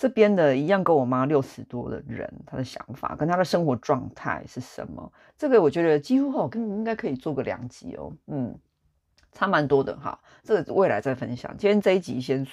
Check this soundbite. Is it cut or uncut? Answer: uncut